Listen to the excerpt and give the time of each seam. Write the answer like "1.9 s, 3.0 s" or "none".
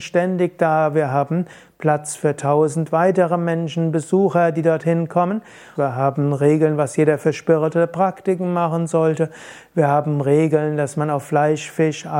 5.7 s

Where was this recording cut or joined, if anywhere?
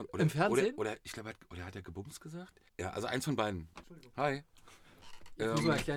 2.7 s, 3.8 s

